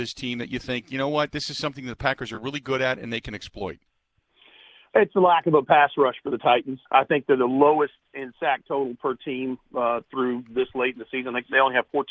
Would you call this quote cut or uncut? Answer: cut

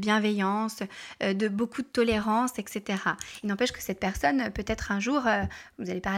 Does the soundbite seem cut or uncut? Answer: uncut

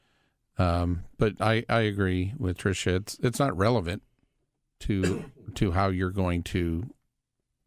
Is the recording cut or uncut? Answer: uncut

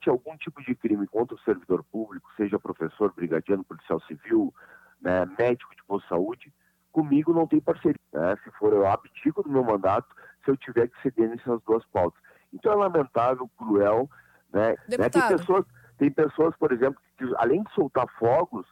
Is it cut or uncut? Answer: cut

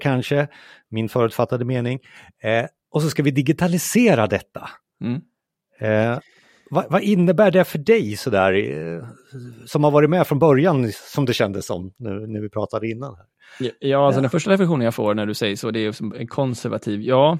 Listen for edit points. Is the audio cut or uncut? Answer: uncut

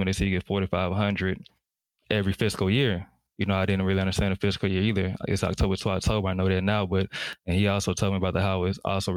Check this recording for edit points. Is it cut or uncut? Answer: uncut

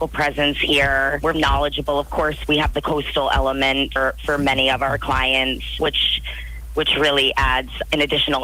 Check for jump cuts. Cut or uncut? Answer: cut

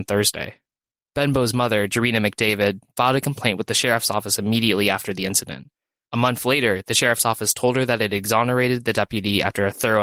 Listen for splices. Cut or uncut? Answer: uncut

